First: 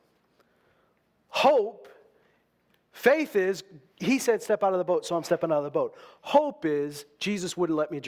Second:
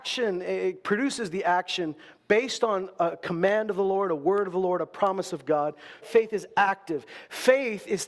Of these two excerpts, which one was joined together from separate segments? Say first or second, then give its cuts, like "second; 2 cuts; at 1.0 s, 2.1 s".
second; 1 cut; at 6.0 s